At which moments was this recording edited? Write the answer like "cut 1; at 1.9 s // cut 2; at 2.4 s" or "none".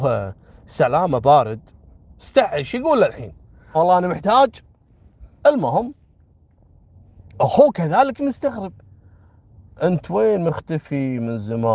cut 1; at 3.7 s // cut 2; at 5.4 s